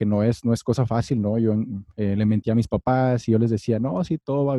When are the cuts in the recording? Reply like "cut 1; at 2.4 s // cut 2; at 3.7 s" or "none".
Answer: none